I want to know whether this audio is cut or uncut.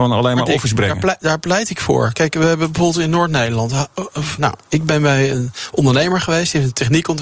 cut